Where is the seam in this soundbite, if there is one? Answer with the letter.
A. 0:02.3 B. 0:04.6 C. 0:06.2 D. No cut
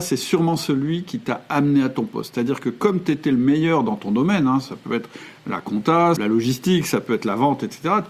C